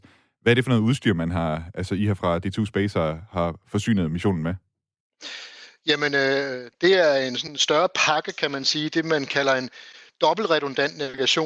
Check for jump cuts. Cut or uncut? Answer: uncut